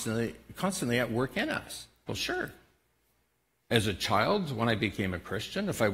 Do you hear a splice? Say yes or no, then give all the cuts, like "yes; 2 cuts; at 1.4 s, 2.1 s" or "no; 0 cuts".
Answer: yes; 1 cut; at 2.1 s